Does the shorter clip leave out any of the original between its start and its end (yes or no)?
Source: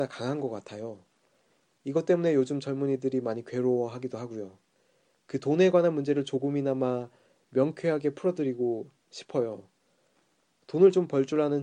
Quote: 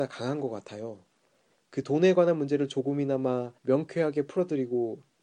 yes